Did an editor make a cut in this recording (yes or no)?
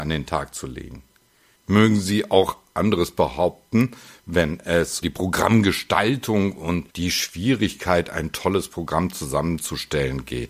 yes